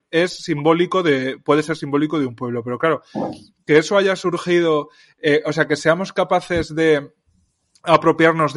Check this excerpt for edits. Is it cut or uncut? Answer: uncut